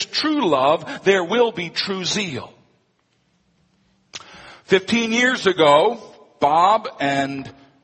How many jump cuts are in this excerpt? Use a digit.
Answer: 0